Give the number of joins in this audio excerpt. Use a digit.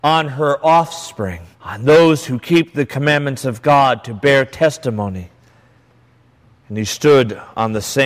1